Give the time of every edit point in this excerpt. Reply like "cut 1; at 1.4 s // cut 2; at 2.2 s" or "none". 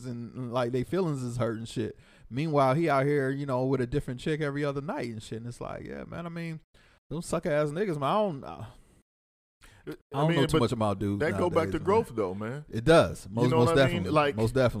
none